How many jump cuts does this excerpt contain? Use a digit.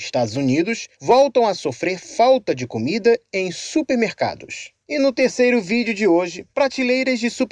1